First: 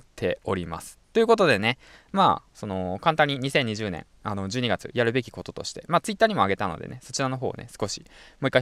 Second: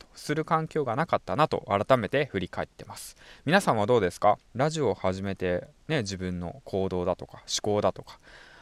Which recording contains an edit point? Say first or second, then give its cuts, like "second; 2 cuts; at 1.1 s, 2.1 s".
second; 1 cut; at 4.5 s